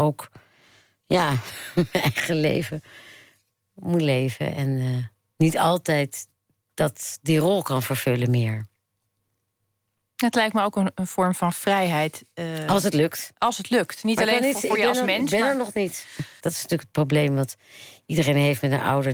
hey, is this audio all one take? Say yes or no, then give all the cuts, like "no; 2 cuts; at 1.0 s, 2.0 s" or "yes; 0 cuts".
no; 1 cut; at 16.4 s